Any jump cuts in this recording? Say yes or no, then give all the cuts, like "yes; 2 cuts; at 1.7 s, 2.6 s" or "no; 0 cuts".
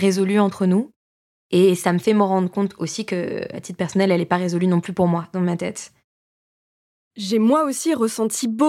no; 0 cuts